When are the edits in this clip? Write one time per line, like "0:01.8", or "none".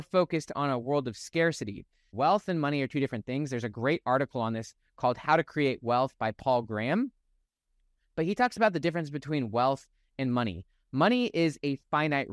0:02.1